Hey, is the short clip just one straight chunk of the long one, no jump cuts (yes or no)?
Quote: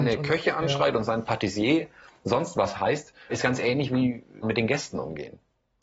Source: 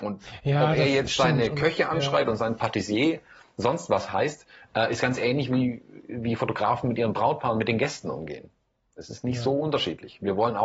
no